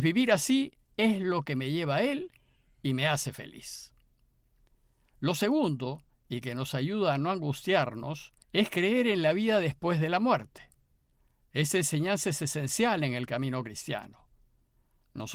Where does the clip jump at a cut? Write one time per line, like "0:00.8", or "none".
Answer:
0:08.4